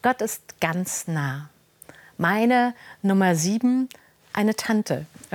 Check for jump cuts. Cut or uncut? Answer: uncut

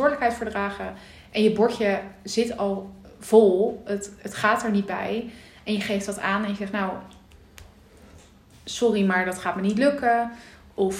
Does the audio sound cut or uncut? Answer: uncut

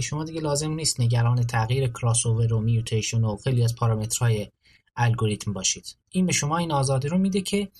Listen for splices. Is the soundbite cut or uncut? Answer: uncut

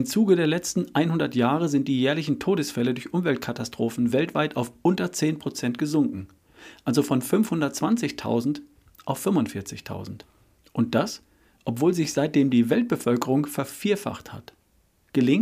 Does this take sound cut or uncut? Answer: uncut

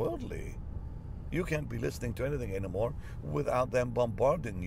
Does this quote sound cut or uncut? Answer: uncut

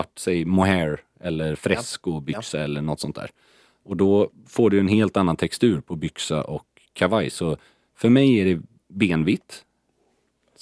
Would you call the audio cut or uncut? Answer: uncut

